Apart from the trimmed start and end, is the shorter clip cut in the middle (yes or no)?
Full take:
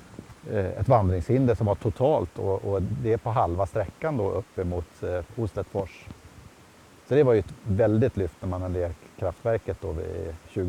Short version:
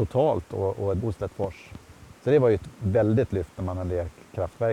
yes